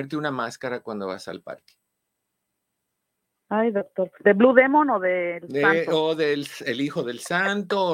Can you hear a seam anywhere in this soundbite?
no; 0 cuts

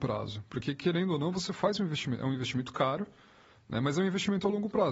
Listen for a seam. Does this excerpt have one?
no; 0 cuts

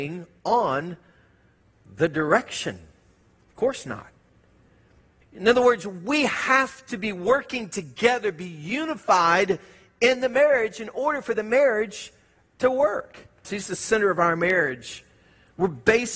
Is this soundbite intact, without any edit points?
no; 2 cuts; at 5.2 s, 13.4 s

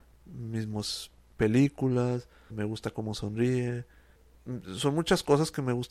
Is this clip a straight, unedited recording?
no; 1 cut; at 2.5 s

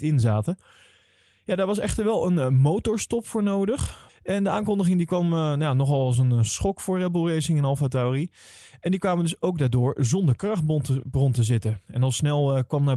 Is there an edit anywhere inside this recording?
yes; 1 cut; at 4.1 s

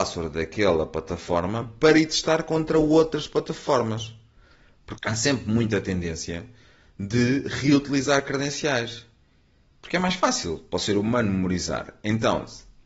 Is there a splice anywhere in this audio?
yes; 1 cut; at 5.0 s

